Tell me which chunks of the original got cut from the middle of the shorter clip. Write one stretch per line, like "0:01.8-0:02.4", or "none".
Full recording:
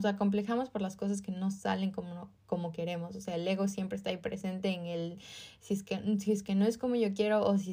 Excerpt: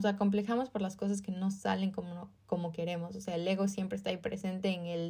none